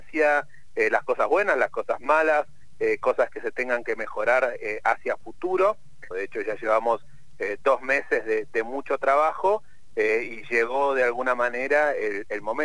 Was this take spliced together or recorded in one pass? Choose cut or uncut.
cut